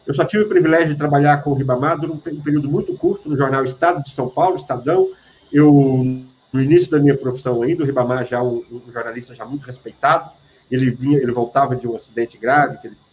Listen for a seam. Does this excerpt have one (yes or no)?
no